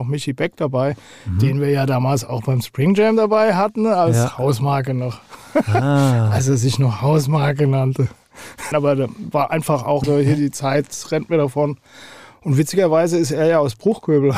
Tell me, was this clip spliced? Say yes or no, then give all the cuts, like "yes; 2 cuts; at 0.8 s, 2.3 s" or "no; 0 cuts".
yes; 2 cuts; at 8.7 s, 10.0 s